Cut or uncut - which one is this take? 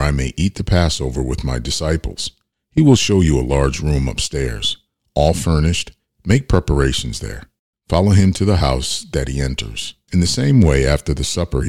cut